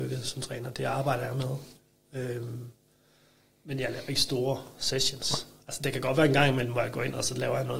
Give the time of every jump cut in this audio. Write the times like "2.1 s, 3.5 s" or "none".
none